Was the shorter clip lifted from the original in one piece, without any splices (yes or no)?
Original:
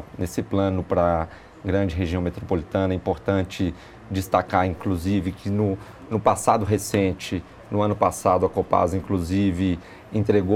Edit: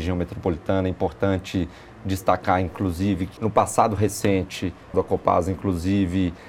no